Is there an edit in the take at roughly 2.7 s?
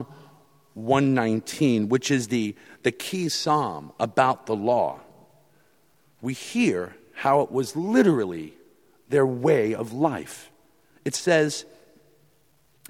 no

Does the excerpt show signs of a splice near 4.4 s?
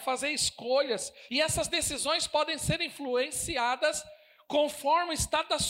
no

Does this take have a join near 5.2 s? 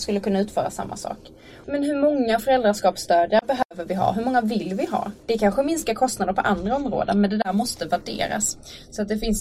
yes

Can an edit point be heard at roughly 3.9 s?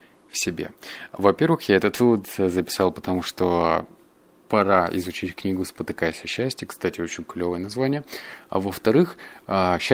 no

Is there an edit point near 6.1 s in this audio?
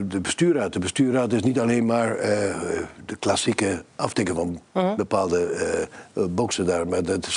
no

